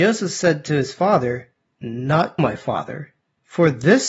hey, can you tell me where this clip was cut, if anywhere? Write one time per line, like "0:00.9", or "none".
0:02.4